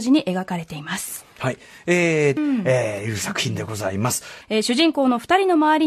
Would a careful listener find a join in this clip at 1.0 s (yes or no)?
no